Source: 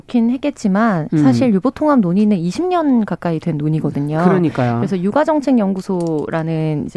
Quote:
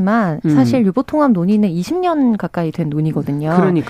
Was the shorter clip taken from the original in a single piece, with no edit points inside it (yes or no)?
yes